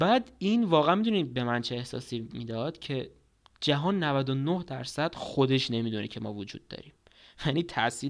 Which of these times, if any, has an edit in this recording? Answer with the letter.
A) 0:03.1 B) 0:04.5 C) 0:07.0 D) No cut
D